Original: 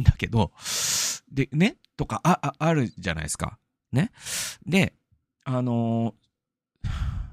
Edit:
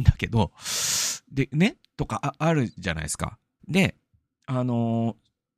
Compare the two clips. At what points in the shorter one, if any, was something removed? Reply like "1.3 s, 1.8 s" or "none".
2.2 s, 3.6 s